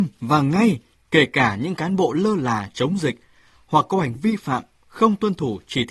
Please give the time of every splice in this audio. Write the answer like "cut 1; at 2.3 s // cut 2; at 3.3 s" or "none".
cut 1; at 4.1 s